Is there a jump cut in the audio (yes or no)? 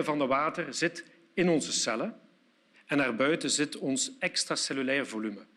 yes